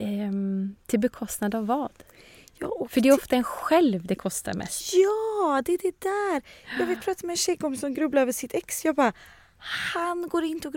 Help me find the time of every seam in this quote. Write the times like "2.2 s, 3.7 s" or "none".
none